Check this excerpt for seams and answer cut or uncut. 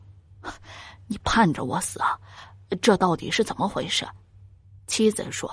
uncut